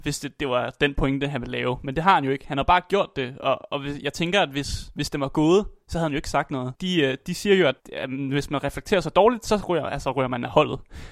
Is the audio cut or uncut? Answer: cut